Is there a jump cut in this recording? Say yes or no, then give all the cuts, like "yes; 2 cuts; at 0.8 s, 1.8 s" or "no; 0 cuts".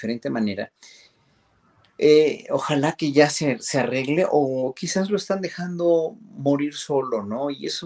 no; 0 cuts